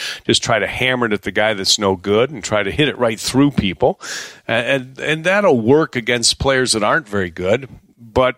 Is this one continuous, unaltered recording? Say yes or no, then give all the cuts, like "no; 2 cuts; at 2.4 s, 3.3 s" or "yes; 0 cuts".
yes; 0 cuts